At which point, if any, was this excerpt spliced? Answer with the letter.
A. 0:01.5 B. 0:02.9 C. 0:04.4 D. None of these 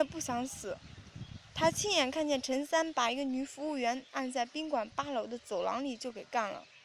A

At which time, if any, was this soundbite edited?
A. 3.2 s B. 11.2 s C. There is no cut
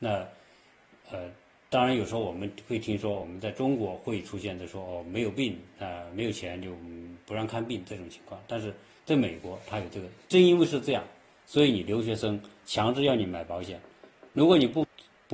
C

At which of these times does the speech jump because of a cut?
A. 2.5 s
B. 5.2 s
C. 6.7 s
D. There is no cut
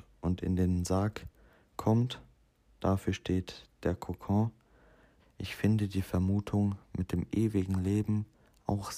B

